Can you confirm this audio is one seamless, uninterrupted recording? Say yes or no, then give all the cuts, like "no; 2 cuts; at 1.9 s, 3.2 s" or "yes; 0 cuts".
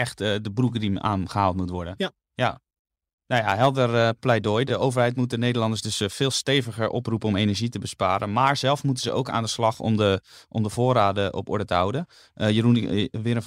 yes; 0 cuts